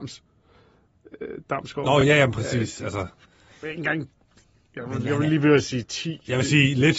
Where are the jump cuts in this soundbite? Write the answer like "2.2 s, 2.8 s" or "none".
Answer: none